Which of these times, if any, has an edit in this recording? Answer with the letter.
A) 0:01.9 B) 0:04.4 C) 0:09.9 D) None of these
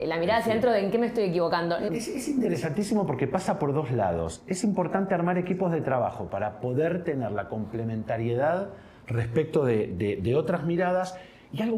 A